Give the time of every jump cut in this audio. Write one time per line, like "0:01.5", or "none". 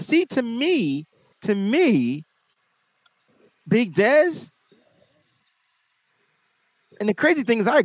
0:01.3